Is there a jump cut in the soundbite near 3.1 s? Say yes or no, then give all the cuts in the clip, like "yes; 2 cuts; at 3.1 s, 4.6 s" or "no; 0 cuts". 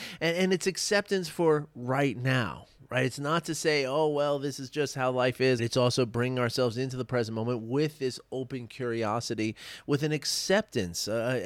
no; 1 cut; at 5.6 s